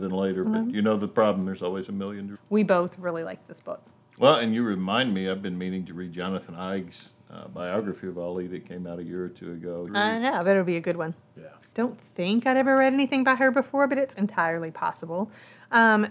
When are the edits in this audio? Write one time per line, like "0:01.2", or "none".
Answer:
0:02.3
0:09.9
0:11.7